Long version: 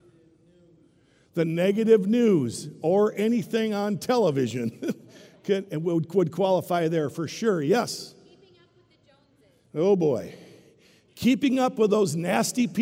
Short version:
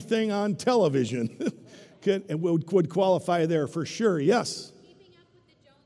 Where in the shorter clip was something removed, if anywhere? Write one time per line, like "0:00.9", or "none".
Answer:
none